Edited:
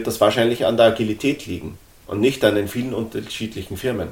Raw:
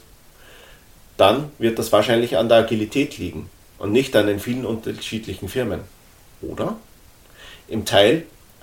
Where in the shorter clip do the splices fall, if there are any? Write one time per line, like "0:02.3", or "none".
none